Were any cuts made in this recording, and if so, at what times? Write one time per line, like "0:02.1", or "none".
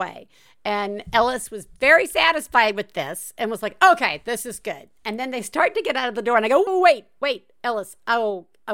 0:06.7